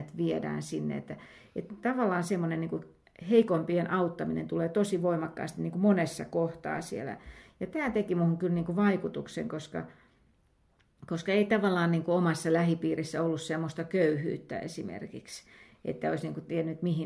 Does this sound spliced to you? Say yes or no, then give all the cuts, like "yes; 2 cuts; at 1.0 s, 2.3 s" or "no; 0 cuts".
no; 0 cuts